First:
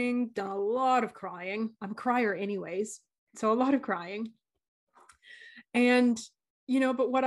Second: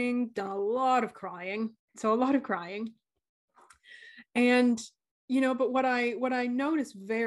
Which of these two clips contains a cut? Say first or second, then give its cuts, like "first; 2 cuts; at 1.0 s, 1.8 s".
second; 1 cut; at 1.8 s